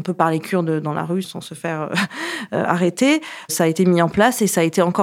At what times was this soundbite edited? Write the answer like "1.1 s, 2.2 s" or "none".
3.4 s